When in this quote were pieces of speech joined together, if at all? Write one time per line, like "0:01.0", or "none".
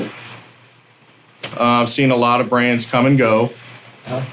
0:01.5